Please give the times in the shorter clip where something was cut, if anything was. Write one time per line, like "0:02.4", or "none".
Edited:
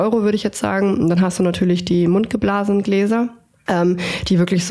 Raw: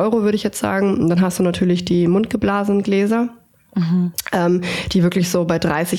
0:03.7